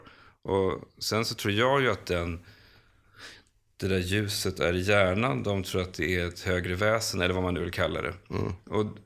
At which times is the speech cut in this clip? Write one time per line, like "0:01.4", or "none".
none